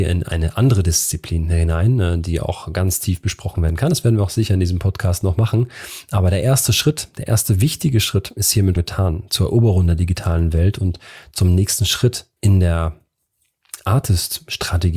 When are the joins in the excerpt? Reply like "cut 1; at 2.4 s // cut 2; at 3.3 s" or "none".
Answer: cut 1; at 8.8 s // cut 2; at 12.4 s